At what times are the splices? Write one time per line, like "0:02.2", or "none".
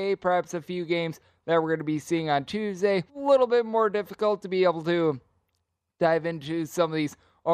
0:03.1

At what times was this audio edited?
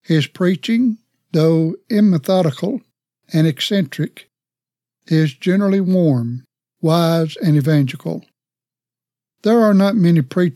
none

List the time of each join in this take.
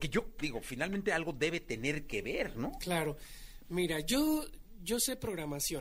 none

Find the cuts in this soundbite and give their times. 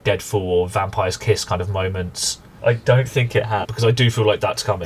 0:02.6
0:03.6

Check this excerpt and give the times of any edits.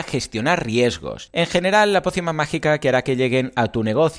0:01.3

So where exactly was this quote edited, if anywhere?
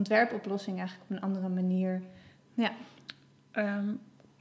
0:02.4

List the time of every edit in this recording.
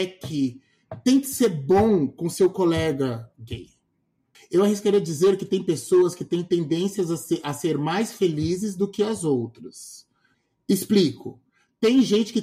0:04.3

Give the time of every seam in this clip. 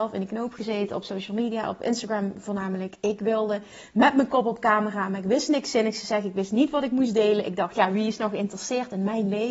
none

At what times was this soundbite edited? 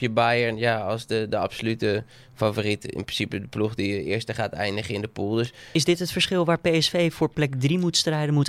none

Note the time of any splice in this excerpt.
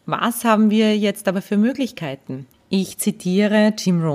0:02.5

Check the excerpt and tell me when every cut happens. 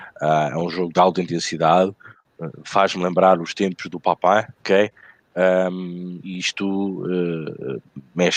0:04.6
0:06.2

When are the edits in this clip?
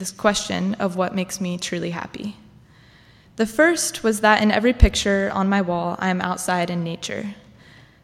0:03.2

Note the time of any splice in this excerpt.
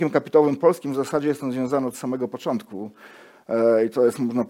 none

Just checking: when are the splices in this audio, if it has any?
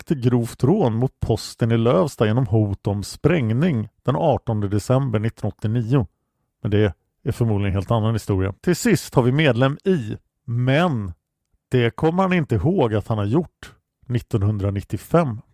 0:08.6
0:10.3

